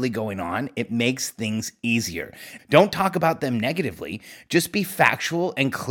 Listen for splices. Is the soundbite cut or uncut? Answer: cut